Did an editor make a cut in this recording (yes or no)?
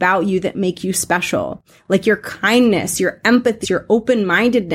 yes